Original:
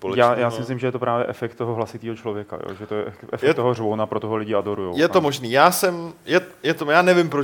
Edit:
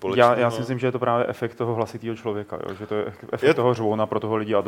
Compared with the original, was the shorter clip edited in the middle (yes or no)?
no